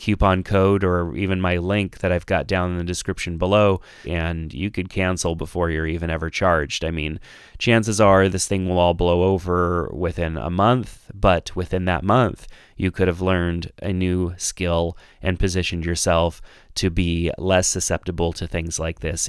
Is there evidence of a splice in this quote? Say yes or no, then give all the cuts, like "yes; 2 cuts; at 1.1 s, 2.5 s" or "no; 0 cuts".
yes; 1 cut; at 4.0 s